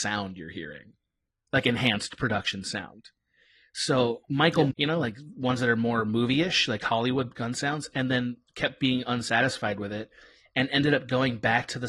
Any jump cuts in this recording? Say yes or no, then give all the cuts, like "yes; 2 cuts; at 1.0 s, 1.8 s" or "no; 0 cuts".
yes; 1 cut; at 4.7 s